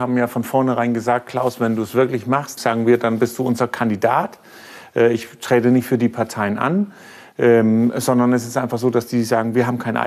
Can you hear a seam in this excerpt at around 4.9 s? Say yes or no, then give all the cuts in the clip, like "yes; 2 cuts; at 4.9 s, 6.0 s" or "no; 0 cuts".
no; 1 cut; at 2.6 s